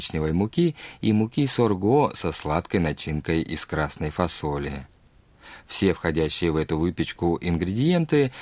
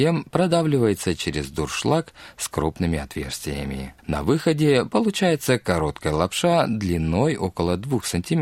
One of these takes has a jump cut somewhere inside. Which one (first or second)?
second